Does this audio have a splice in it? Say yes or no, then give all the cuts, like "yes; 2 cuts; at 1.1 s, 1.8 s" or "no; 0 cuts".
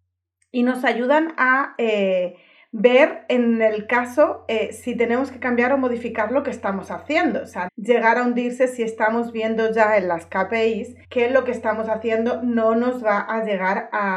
yes; 2 cuts; at 7.7 s, 11.0 s